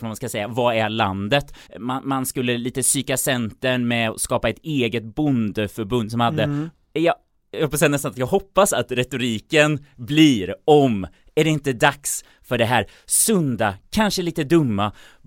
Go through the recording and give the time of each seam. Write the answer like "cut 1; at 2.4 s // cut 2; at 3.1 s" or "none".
cut 1; at 1.7 s // cut 2; at 6.7 s // cut 3; at 13.8 s